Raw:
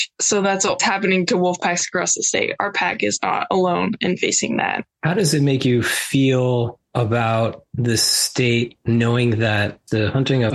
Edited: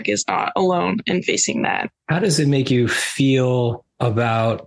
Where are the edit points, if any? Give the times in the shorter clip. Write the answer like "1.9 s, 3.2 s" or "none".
none

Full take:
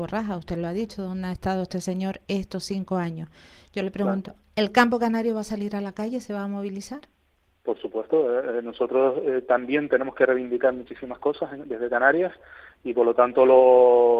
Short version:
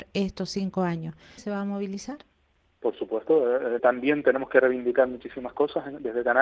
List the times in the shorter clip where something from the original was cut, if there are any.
1.4 s, 3.8 s

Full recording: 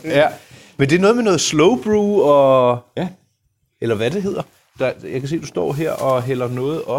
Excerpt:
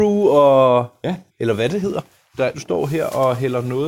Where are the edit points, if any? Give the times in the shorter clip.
1.3 s, 2.5 s

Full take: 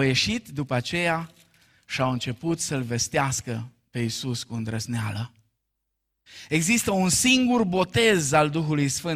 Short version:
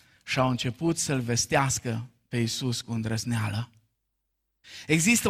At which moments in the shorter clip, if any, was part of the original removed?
none

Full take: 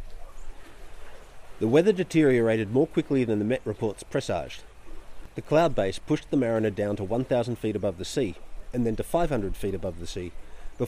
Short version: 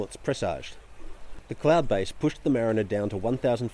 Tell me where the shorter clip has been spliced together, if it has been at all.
none

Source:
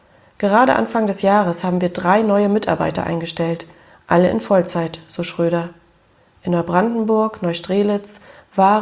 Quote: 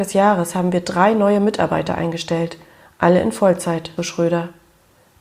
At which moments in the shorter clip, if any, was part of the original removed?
4.0 s

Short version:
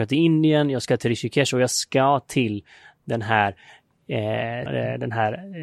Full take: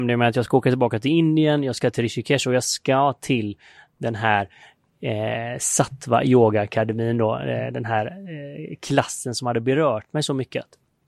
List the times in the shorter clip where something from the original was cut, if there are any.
4.7 s

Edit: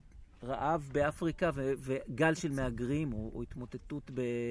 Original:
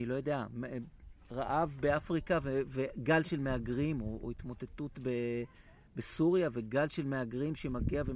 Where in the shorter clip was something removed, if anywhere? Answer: none

